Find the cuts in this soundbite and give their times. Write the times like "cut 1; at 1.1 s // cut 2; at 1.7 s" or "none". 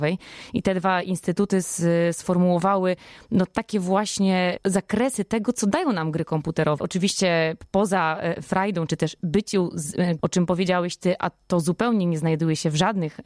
cut 1; at 6.8 s // cut 2; at 8.9 s // cut 3; at 10.2 s